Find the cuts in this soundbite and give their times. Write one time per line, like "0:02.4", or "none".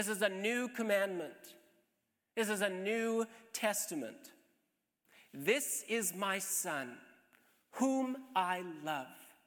none